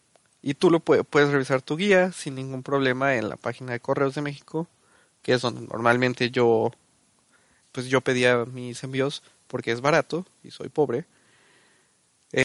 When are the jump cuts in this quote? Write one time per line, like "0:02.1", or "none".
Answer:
0:07.6